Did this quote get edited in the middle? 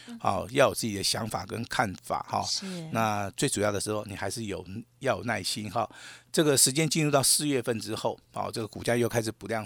no; 0 cuts

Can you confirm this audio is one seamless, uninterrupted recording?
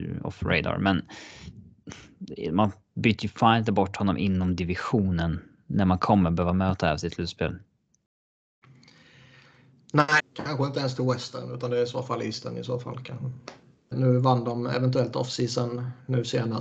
no; 2 cuts; at 10.2 s, 13.9 s

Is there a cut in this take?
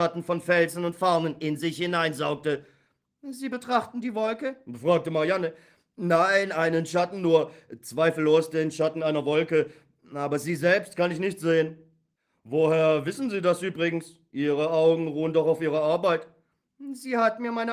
no; 0 cuts

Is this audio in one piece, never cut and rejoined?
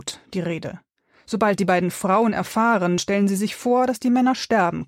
no; 1 cut; at 3.0 s

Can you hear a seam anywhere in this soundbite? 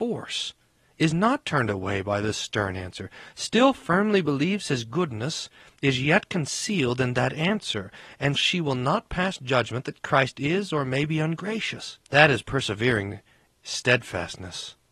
yes; 2 cuts; at 8.3 s, 12.0 s

